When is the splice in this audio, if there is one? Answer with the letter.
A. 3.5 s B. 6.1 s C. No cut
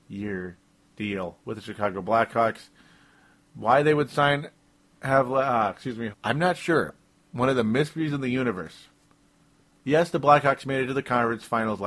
B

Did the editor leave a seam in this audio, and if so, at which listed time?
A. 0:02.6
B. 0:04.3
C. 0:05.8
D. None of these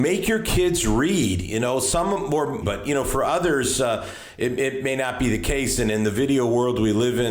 A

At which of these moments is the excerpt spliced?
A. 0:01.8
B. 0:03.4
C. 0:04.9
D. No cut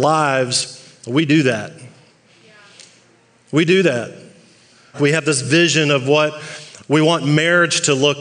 C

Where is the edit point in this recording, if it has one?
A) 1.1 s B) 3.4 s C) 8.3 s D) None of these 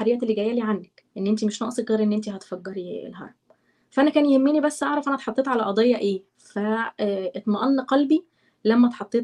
A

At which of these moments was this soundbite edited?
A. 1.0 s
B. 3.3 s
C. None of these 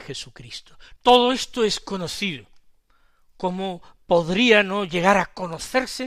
A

